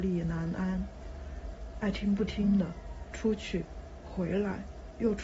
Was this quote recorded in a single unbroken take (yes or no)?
yes